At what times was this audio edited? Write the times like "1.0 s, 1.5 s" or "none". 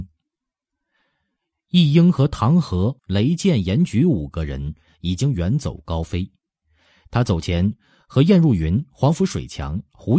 3.0 s